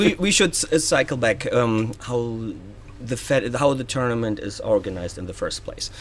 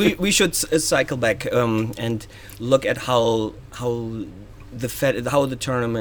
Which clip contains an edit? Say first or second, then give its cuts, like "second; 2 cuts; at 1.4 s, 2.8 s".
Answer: first; 1 cut; at 1.9 s